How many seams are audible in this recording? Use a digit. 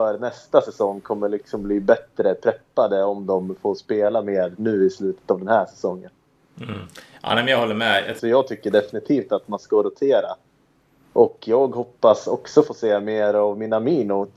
1